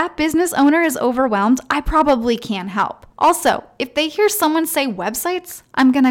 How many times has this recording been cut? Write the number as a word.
one